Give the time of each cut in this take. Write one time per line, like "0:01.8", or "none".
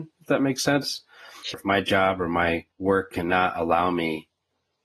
0:01.5
0:02.7

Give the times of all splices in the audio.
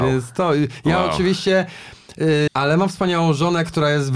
0:02.5

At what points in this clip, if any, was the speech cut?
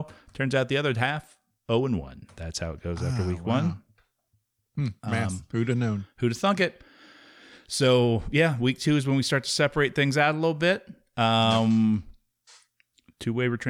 none

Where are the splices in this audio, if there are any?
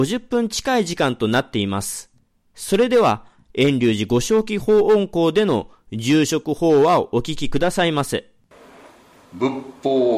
0:09.3

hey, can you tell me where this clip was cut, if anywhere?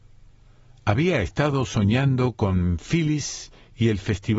none

